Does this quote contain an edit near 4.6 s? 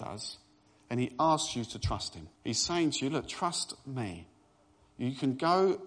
no; 1 cut; at 2.3 s

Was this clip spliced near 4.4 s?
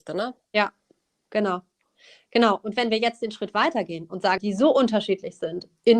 yes; 1 cut; at 4.4 s

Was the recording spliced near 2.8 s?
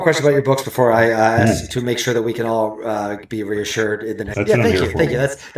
no; 1 cut; at 4.3 s

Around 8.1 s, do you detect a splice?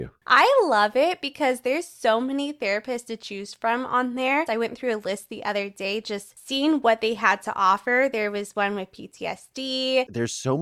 no; 1 cut; at 4.5 s

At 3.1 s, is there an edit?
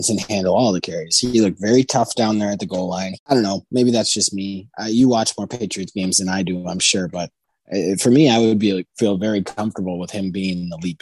yes; 1 cut; at 3.1 s

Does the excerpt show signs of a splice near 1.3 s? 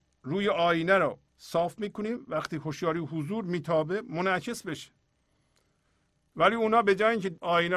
yes; 1 cut; at 1.3 s

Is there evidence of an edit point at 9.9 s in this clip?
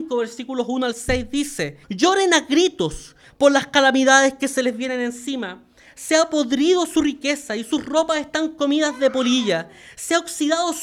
no; 1 cut; at 1.8 s

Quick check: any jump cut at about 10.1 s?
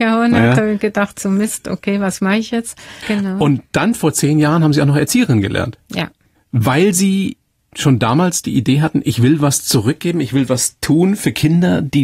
no; 1 cut; at 3.0 s

